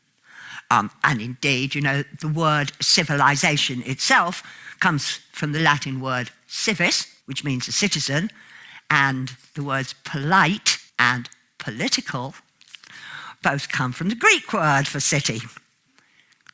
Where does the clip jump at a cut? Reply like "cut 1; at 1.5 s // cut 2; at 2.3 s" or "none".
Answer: cut 1; at 7.2 s // cut 2; at 10.9 s

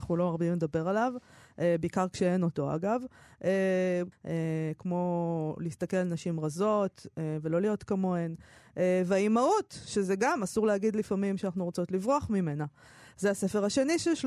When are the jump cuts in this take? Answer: cut 1; at 4.1 s

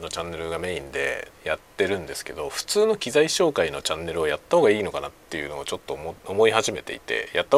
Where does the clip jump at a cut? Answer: cut 1; at 1.4 s

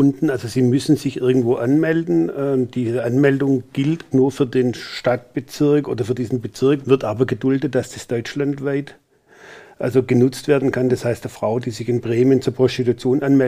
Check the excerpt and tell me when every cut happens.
cut 1; at 4.1 s // cut 2; at 6.8 s

